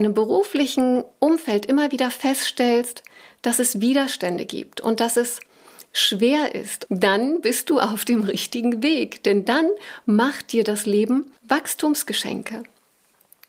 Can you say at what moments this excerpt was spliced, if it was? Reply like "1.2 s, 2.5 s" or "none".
6.9 s, 11.4 s